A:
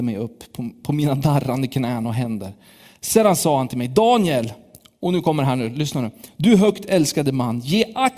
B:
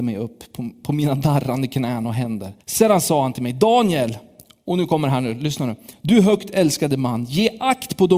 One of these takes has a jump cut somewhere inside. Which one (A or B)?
B